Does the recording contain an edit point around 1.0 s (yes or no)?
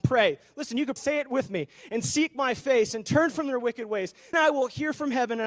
yes